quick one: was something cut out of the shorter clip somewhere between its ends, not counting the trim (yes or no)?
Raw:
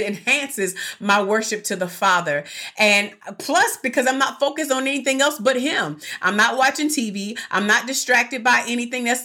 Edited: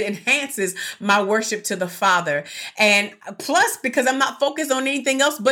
no